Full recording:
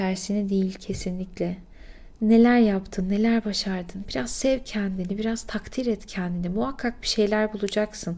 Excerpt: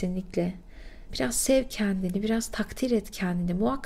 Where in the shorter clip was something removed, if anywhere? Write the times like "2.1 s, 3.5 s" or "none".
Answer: 1.1 s